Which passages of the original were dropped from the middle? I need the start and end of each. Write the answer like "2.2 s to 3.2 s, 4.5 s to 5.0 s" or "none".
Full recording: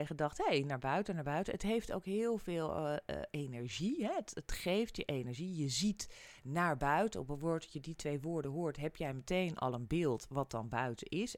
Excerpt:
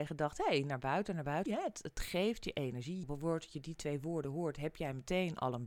1.5 s to 4.0 s, 5.5 s to 7.2 s